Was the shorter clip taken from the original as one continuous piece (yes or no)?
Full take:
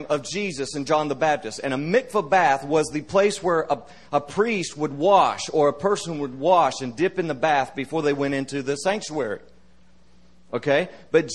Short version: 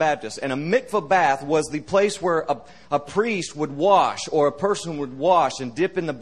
yes